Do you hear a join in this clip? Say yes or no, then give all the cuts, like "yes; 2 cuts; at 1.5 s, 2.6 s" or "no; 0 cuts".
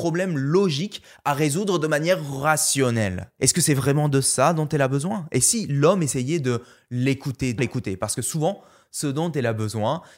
yes; 1 cut; at 7.6 s